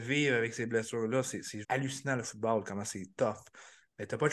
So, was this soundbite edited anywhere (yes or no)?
yes